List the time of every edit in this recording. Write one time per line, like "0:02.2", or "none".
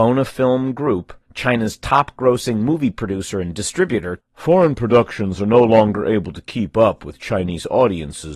0:01.2
0:04.2